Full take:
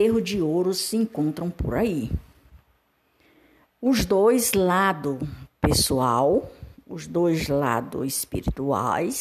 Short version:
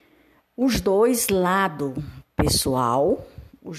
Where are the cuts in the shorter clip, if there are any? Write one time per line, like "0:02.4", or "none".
none